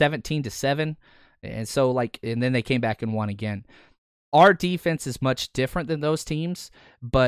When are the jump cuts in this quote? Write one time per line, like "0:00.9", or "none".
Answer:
none